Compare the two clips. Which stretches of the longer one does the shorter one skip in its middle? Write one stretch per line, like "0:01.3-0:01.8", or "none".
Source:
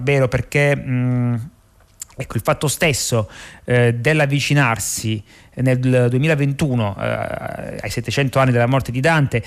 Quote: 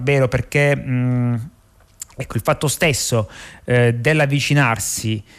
none